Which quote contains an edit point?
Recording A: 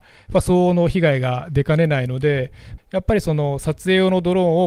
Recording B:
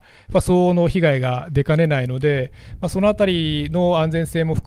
A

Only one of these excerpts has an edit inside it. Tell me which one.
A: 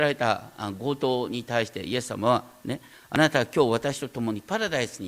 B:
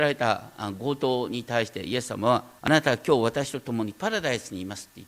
B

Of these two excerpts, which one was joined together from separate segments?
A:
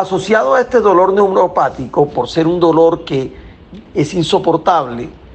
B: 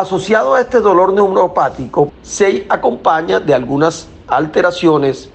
B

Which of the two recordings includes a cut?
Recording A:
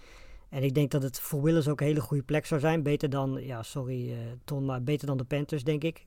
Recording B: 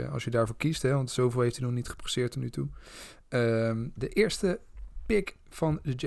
B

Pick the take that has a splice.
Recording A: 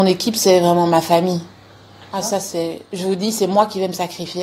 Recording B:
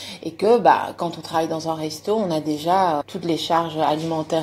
B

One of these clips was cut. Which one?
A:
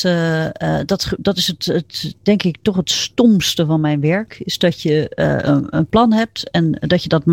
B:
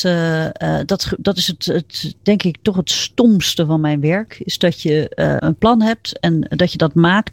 B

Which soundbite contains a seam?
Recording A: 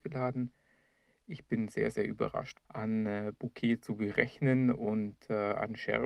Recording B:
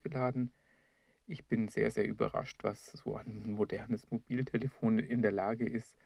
A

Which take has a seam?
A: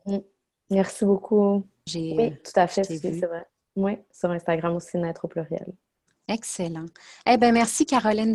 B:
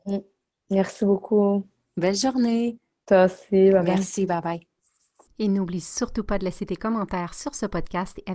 A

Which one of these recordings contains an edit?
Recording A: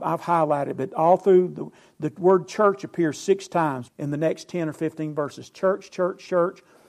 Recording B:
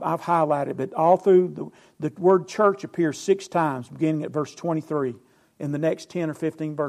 A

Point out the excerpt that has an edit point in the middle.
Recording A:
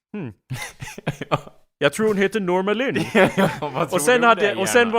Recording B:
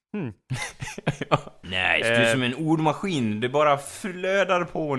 B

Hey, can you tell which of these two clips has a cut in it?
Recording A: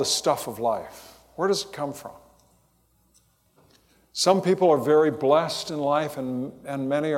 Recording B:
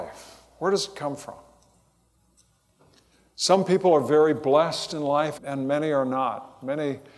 B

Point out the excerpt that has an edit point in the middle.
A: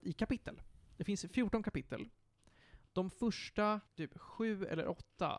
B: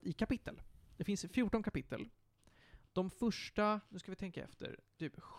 A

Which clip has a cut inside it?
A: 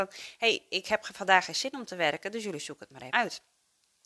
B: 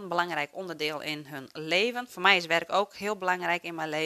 A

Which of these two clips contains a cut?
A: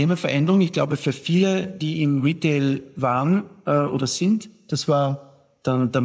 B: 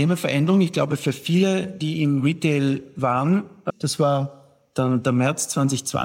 B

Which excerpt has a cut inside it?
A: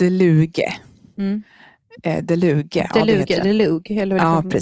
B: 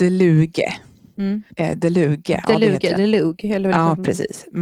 B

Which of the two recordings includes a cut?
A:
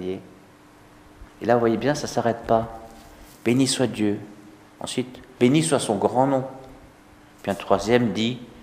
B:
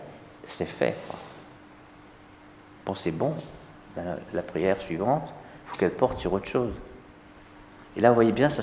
A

